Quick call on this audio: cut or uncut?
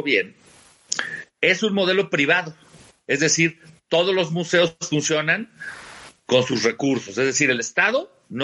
uncut